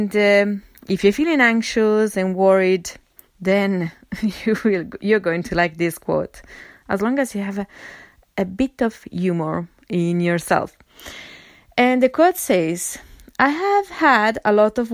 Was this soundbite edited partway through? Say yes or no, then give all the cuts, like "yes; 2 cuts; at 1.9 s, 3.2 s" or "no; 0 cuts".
no; 0 cuts